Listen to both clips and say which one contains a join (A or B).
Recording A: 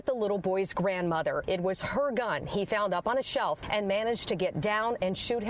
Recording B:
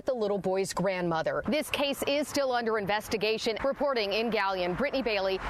B